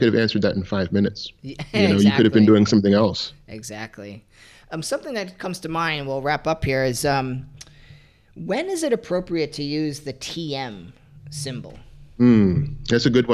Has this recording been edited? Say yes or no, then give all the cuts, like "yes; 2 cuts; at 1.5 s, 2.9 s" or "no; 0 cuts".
no; 0 cuts